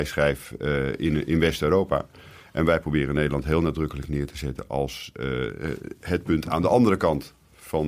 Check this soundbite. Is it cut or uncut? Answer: uncut